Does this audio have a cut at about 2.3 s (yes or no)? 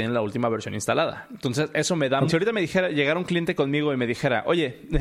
yes